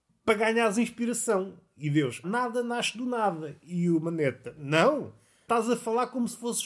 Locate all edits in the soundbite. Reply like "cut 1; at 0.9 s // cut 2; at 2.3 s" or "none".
cut 1; at 2.2 s